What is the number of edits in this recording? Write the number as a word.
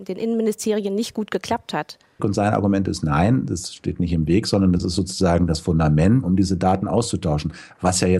two